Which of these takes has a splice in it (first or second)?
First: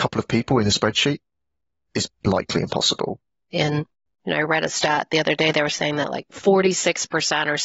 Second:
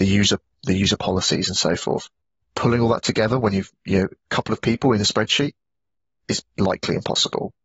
first